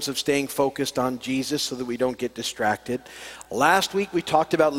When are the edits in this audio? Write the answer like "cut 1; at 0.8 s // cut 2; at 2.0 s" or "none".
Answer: none